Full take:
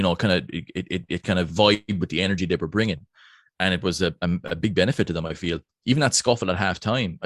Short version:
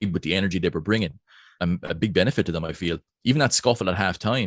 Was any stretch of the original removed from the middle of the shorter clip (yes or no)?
yes